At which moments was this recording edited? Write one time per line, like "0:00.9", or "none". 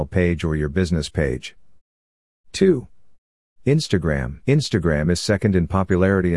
0:04.4